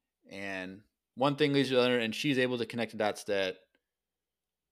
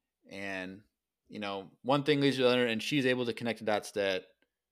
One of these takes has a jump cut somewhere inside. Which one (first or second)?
first